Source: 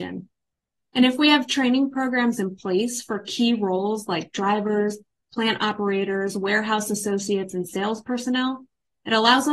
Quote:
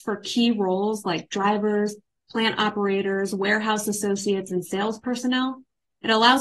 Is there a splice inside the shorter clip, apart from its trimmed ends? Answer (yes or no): no